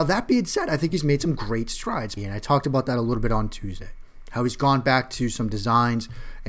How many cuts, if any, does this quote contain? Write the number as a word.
one